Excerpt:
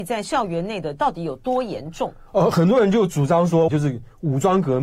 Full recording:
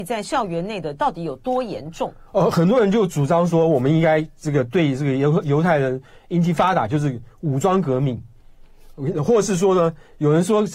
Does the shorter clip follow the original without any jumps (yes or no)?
no